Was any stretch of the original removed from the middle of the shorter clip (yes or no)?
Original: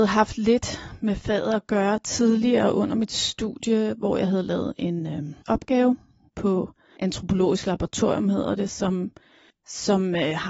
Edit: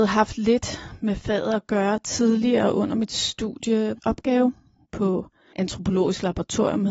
yes